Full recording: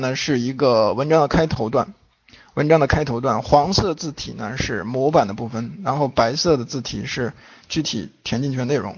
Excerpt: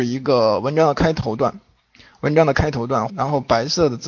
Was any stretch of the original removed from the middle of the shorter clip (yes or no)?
yes